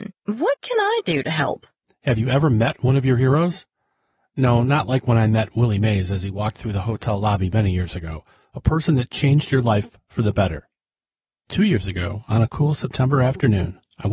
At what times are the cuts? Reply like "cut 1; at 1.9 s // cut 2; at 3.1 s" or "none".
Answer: cut 1; at 8.4 s

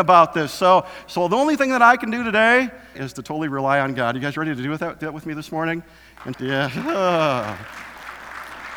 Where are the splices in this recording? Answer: cut 1; at 3.0 s // cut 2; at 6.3 s

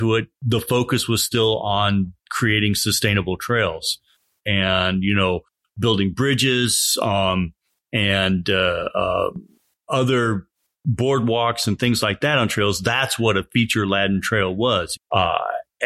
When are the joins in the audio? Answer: cut 1; at 4.4 s // cut 2; at 15.0 s

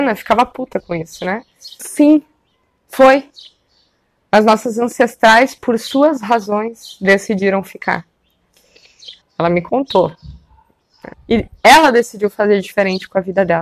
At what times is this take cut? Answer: cut 1; at 1.8 s // cut 2; at 9.2 s // cut 3; at 11.1 s

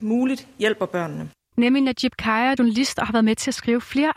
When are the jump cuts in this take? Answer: cut 1; at 1.5 s // cut 2; at 2.6 s

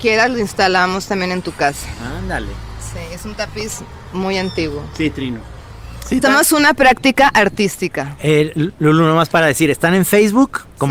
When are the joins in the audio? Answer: cut 1; at 6.2 s

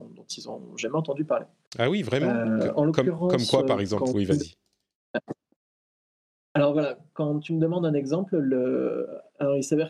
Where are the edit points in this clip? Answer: none

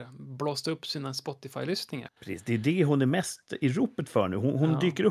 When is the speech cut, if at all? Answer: cut 1; at 2.1 s

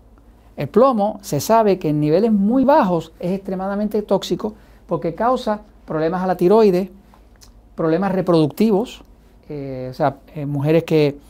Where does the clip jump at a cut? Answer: cut 1; at 2.6 s // cut 2; at 10.3 s

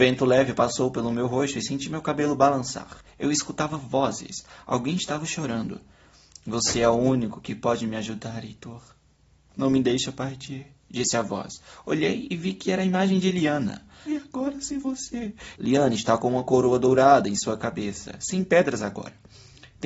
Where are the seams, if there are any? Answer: cut 1; at 14.1 s // cut 2; at 15.6 s

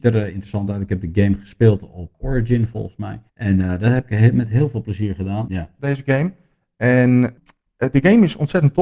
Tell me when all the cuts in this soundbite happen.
cut 1; at 3.3 s // cut 2; at 5.5 s

